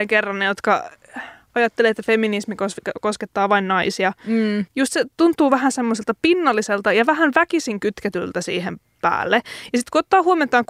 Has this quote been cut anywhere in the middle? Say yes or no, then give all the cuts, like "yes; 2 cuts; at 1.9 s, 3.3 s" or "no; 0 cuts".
yes; 1 cut; at 4.7 s